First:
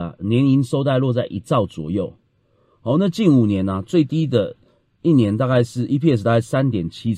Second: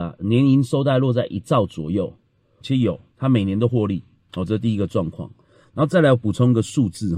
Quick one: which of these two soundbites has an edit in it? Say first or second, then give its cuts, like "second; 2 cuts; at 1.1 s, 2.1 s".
second; 1 cut; at 2.6 s